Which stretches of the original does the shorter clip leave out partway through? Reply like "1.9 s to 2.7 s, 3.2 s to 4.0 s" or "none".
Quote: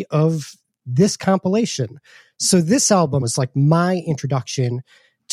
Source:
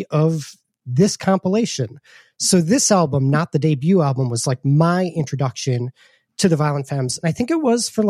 3.2 s to 4.3 s

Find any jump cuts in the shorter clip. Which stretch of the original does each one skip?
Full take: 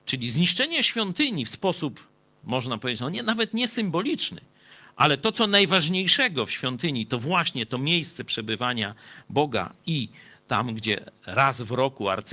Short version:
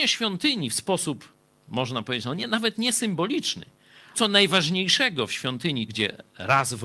4.9 s to 5.3 s, 7.1 s to 10.8 s

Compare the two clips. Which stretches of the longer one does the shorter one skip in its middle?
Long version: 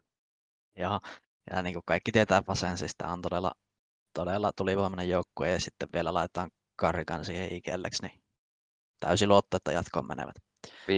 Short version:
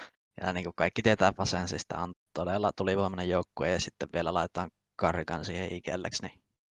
3.2 s to 3.9 s

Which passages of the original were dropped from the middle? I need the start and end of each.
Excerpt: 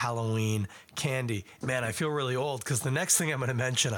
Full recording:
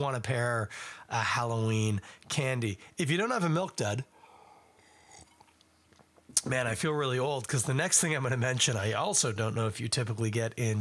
2.9 s to 6.4 s

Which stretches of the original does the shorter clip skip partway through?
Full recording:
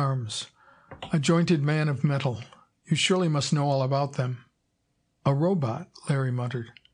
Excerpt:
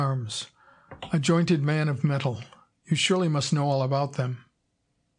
none

